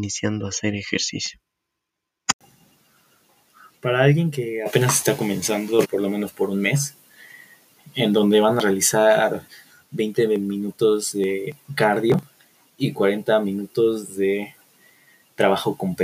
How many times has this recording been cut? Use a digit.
1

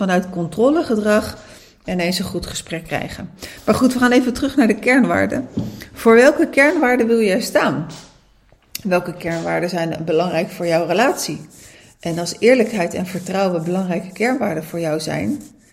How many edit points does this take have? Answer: 0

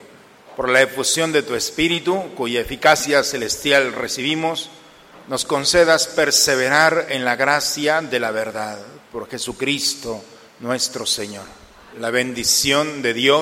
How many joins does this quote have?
1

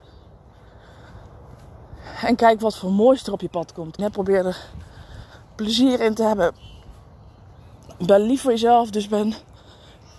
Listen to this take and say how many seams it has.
1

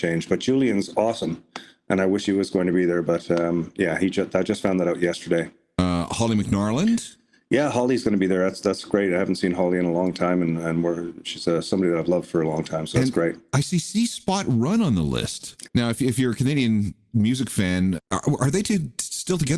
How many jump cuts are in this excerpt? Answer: 2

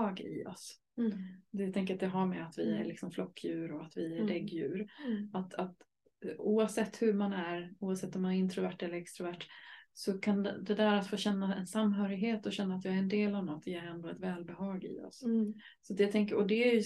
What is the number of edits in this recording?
0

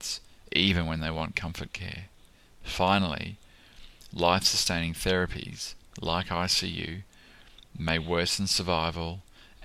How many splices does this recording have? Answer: 0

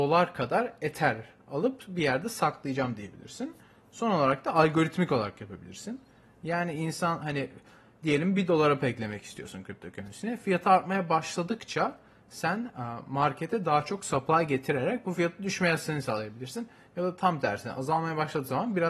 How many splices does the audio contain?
0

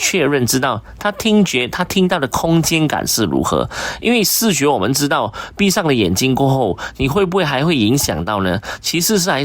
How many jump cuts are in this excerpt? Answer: 0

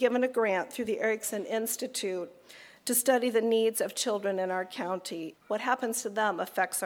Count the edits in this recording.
1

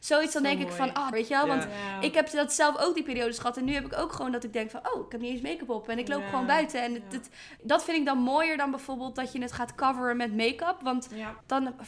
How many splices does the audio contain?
1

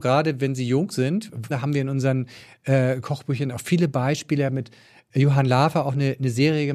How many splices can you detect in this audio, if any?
1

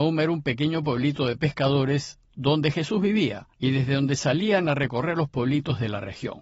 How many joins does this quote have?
1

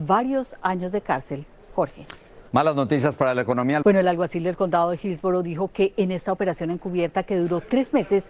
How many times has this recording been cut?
2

